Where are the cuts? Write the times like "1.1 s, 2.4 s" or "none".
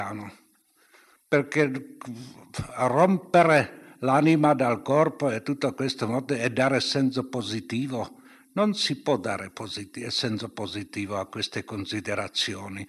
none